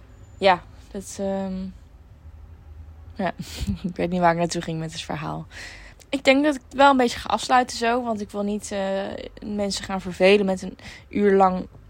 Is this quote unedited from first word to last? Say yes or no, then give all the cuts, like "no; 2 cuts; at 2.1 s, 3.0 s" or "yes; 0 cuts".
no; 1 cut; at 5.9 s